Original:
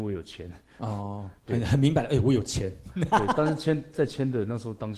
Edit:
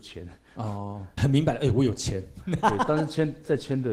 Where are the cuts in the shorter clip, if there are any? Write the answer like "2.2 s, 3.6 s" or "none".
1.2 s